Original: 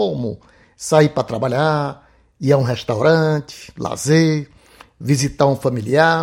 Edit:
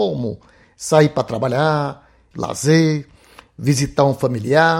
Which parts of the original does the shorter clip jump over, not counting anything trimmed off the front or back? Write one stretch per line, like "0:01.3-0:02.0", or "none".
0:02.3-0:03.7